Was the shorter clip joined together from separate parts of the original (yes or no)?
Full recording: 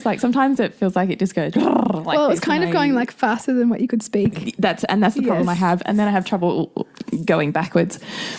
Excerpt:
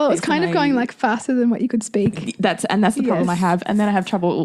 no